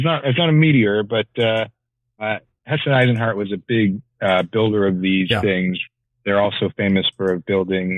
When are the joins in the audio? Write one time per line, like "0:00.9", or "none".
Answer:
none